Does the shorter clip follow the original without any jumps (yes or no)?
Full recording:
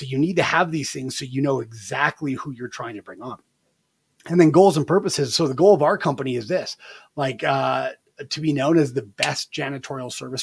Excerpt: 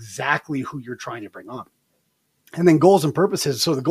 yes